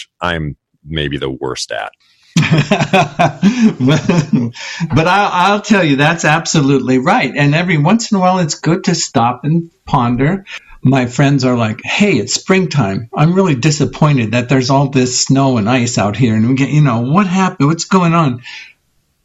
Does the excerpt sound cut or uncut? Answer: uncut